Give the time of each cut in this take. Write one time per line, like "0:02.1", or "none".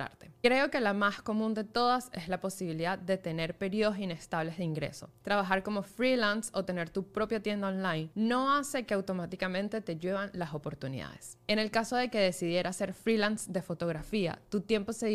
0:11.5